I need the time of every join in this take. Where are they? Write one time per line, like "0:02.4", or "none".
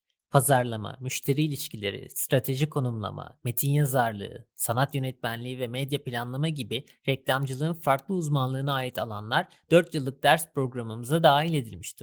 none